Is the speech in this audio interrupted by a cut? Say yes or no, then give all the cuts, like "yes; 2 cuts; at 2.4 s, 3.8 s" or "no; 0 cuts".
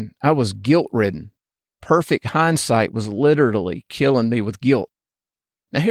no; 0 cuts